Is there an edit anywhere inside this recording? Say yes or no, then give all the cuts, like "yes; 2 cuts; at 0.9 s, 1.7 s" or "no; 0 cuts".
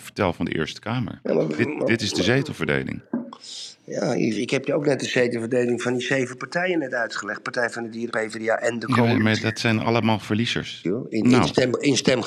yes; 2 cuts; at 8.1 s, 10.8 s